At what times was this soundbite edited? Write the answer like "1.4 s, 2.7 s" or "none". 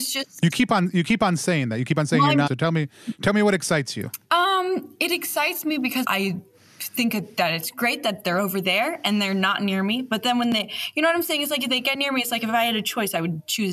2.5 s, 4.2 s, 6.0 s